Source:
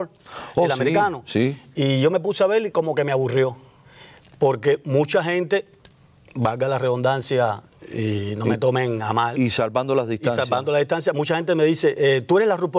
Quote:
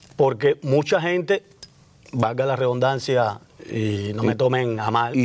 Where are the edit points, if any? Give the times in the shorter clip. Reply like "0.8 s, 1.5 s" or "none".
none